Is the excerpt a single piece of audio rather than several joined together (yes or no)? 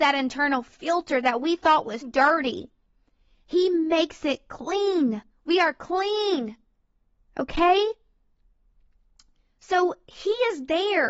no